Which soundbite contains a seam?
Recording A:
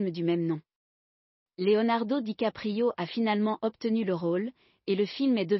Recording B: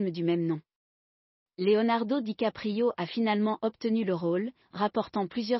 B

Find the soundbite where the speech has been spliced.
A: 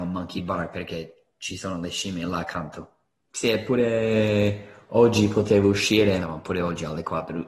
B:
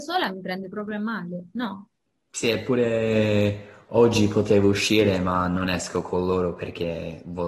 A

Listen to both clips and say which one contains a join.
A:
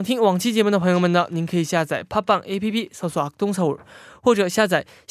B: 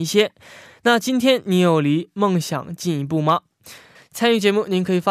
B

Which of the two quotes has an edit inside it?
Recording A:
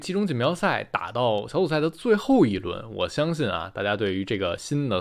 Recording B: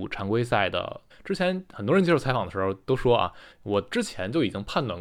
B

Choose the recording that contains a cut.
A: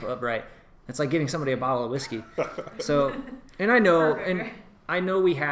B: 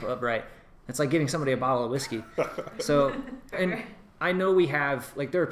B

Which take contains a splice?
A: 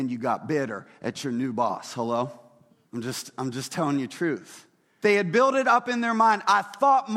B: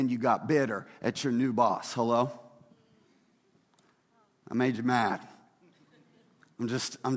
A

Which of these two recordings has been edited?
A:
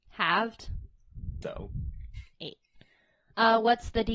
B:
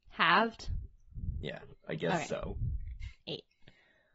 A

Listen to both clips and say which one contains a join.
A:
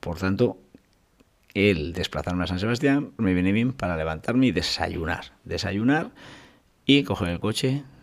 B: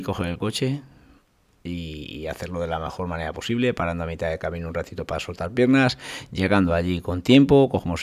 A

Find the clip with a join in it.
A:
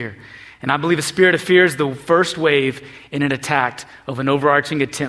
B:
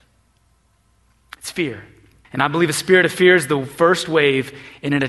B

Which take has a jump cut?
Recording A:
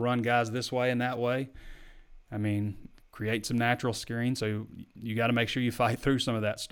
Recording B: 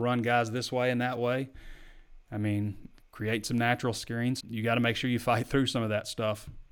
B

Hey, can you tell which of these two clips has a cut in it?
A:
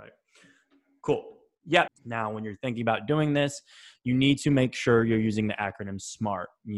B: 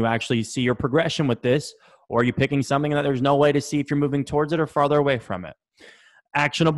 A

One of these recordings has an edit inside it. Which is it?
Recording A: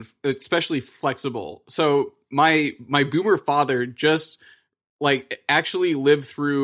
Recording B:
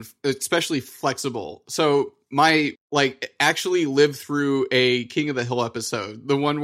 B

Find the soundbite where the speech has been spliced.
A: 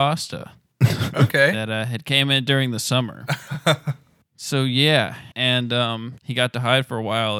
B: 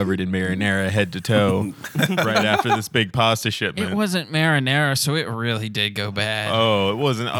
A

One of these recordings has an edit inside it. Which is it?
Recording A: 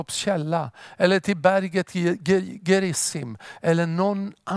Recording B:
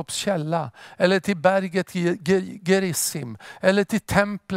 A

